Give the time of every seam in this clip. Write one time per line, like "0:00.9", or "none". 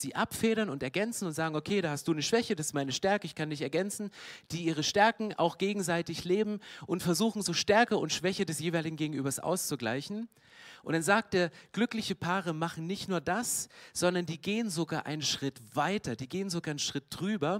none